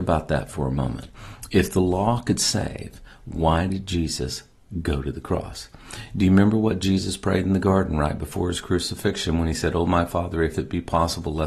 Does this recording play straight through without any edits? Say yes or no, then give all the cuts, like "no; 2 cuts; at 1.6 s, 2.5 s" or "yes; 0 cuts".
yes; 0 cuts